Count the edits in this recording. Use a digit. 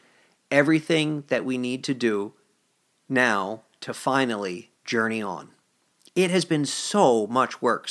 1